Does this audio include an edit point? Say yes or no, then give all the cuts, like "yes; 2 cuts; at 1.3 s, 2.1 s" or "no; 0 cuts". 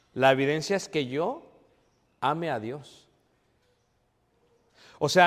no; 0 cuts